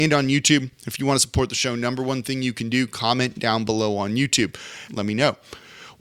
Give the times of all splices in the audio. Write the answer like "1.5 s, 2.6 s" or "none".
4.9 s